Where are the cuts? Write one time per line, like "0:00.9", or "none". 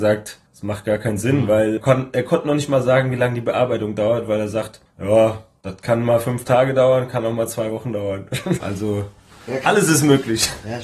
0:01.8
0:08.6